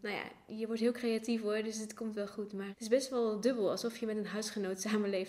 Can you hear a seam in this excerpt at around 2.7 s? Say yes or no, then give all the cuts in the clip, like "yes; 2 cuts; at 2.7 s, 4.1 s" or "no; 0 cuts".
yes; 1 cut; at 2.7 s